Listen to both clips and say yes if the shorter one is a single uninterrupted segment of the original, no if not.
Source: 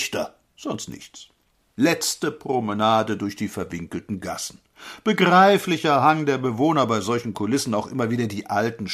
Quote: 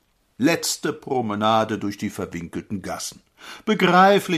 yes